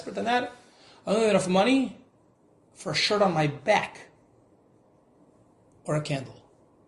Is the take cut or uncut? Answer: uncut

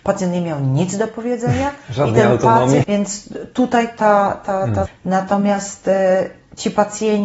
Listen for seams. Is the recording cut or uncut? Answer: cut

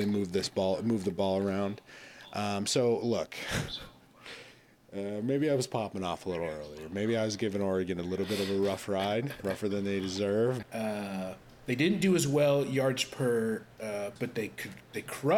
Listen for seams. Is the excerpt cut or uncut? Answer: cut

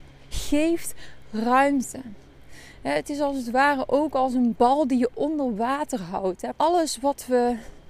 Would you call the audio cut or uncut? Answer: cut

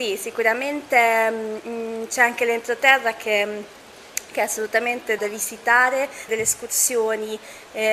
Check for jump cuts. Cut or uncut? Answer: cut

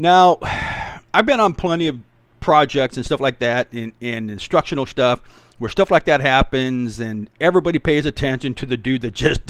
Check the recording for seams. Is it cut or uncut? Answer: cut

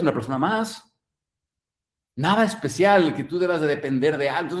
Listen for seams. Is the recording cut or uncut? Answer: uncut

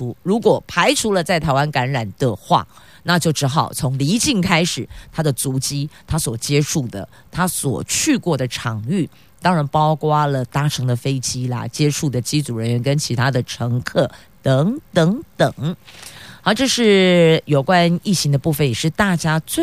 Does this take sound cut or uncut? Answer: uncut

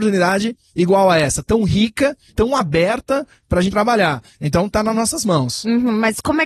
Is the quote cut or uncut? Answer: cut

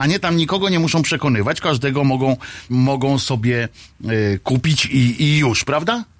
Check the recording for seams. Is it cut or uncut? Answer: cut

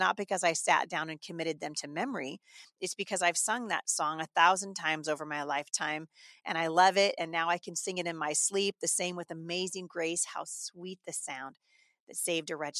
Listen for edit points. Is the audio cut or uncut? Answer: uncut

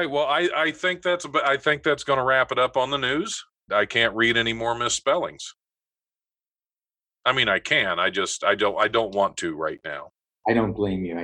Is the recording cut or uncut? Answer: cut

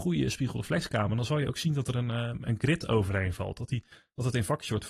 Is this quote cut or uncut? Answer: uncut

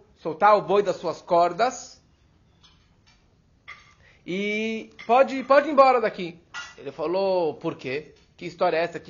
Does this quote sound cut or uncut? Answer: uncut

